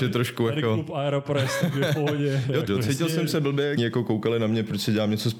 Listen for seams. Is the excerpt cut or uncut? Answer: cut